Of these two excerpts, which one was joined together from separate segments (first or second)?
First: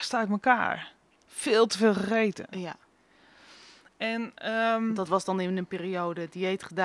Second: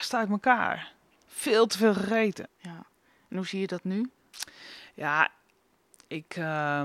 second